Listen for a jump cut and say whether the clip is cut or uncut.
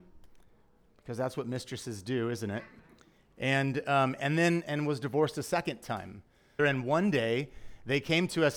cut